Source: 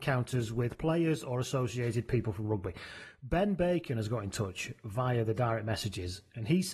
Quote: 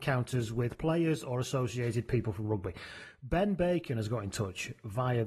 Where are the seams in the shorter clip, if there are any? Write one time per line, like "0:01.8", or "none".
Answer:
none